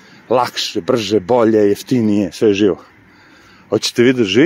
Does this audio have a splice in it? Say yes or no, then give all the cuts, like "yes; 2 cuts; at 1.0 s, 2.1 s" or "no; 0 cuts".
no; 0 cuts